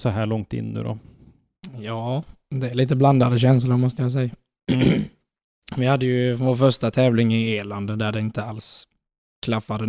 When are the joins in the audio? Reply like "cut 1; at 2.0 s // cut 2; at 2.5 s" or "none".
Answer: none